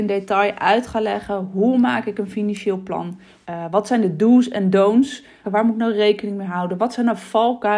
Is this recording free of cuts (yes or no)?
no